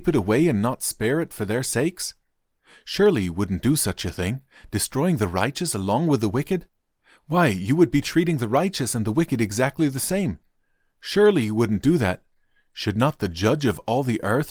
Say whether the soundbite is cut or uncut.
uncut